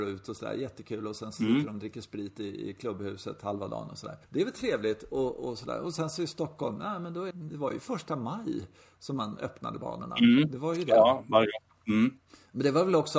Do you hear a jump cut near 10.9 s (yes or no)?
no